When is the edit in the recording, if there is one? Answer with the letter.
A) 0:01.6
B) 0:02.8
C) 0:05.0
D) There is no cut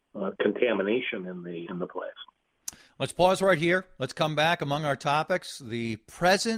A